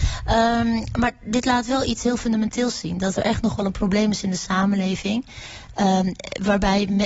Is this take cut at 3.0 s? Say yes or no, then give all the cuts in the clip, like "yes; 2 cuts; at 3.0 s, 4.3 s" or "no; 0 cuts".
no; 0 cuts